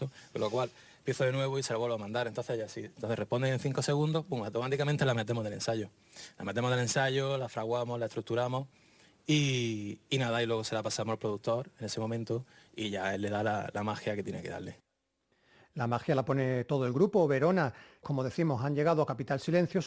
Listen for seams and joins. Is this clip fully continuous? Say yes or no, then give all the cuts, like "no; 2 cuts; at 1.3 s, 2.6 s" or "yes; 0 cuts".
no; 1 cut; at 18.0 s